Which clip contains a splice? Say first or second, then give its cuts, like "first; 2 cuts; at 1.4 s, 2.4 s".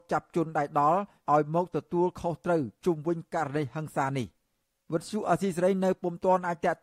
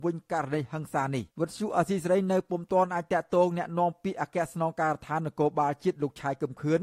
second; 1 cut; at 1.3 s